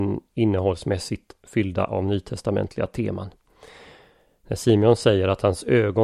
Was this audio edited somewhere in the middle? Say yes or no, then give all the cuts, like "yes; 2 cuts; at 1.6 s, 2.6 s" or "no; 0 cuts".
no; 0 cuts